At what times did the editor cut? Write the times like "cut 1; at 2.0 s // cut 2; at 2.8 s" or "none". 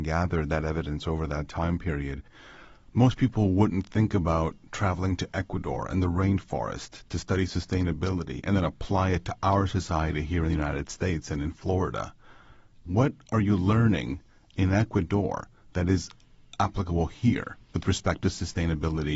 none